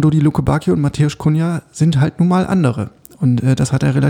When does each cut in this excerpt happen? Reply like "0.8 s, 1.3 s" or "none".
none